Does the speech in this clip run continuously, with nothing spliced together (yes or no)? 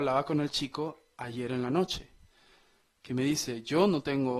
yes